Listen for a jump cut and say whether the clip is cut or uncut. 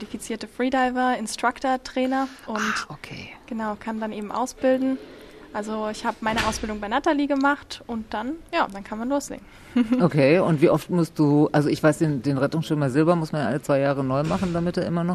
uncut